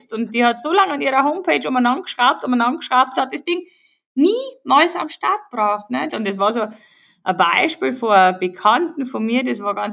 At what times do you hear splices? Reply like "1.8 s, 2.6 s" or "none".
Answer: 3.1 s, 6.1 s

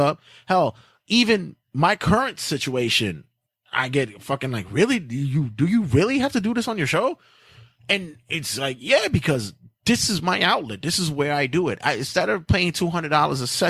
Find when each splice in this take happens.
1.6 s

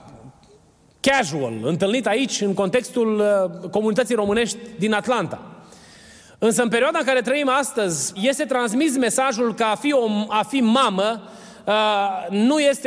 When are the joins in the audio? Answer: 8.2 s

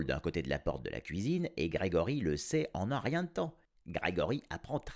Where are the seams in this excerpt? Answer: 3.8 s

